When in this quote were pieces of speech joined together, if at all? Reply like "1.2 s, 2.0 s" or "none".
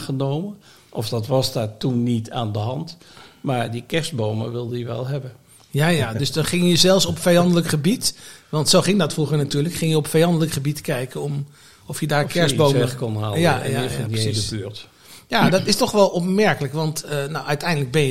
none